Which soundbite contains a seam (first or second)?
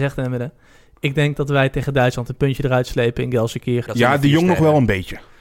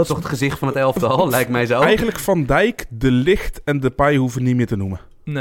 first